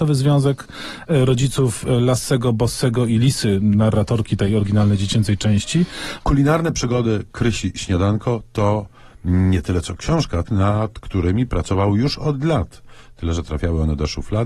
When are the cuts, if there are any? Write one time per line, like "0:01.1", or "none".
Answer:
0:06.2
0:10.5

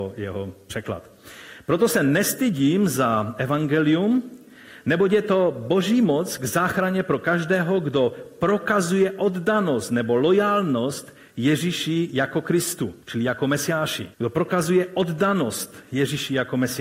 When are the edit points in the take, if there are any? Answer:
0:13.0
0:14.1

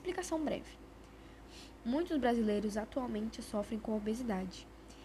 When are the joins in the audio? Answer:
0:01.8

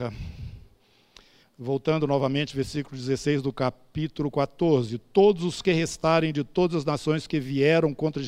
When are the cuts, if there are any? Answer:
0:01.4

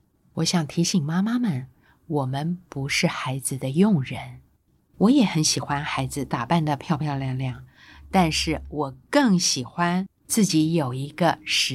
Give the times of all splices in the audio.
none

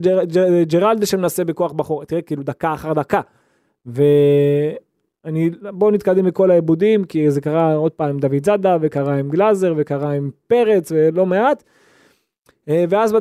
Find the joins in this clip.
none

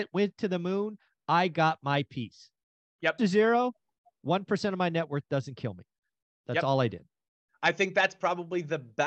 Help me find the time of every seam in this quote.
0:03.2

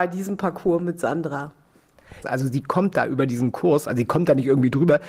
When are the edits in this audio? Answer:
0:02.2

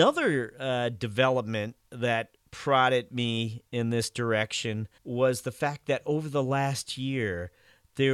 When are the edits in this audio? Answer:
0:05.0

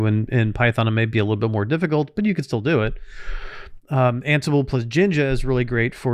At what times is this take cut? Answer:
none

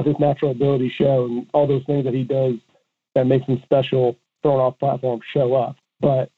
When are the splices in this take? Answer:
0:04.4

